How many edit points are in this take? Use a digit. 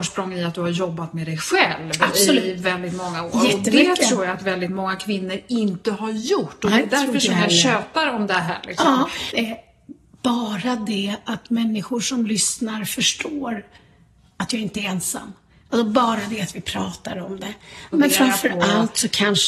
2